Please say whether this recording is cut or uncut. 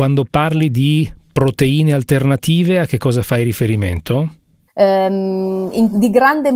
cut